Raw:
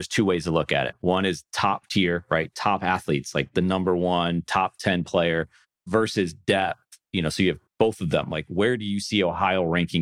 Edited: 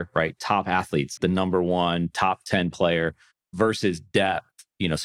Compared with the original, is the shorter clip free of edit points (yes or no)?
no